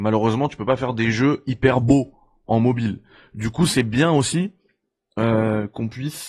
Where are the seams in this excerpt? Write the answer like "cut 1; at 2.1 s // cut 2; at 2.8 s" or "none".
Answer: none

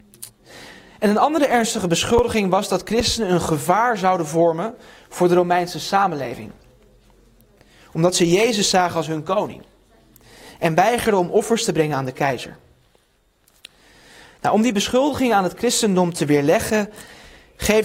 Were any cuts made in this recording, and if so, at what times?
none

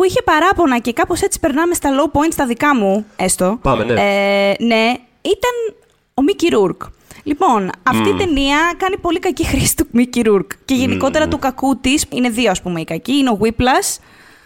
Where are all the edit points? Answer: cut 1; at 12.1 s

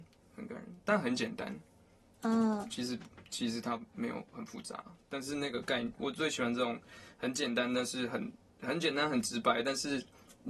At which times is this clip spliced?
none

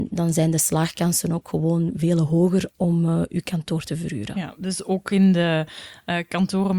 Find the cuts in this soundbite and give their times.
none

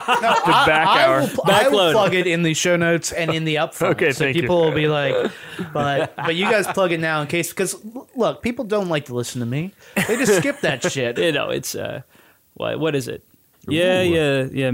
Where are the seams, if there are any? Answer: cut 1; at 11.2 s // cut 2; at 13.5 s

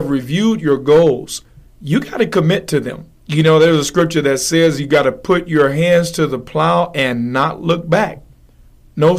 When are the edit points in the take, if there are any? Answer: cut 1; at 3.2 s

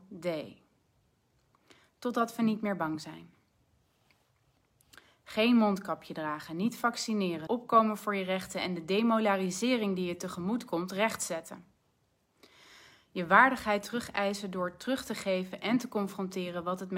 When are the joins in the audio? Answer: cut 1; at 7.5 s

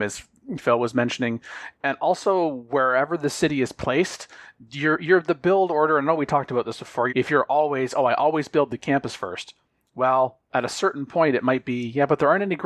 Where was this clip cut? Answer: cut 1; at 7.1 s

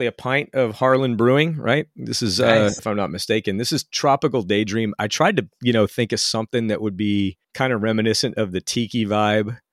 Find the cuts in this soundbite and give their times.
cut 1; at 2.8 s // cut 2; at 7.4 s

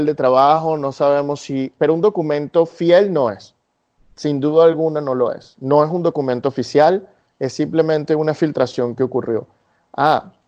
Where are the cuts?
none

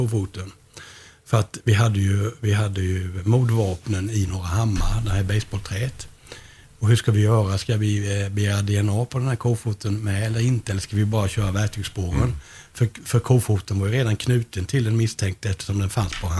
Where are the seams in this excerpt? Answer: cut 1; at 3.2 s

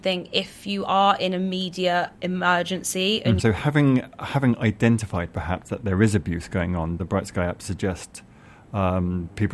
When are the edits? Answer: cut 1; at 2.2 s // cut 2; at 3.4 s // cut 3; at 7.0 s

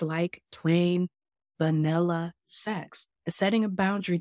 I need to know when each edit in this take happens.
cut 1; at 1.5 s // cut 2; at 3.1 s

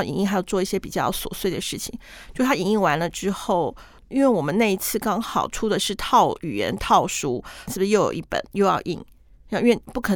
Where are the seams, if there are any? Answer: cut 1; at 7.7 s

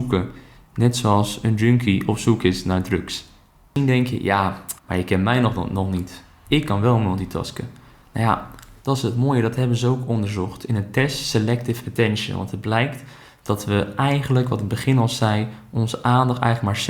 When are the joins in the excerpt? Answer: cut 1; at 4.8 s

